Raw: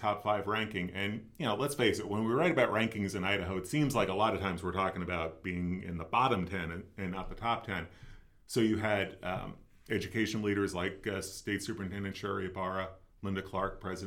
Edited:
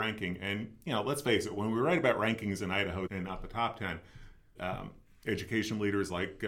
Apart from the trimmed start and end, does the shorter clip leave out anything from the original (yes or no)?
yes